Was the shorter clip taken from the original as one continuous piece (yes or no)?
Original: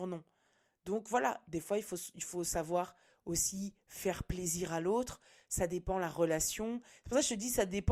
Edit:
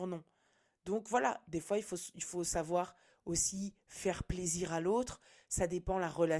yes